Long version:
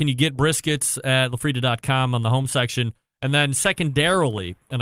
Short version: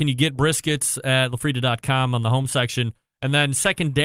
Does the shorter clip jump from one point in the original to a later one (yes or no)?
no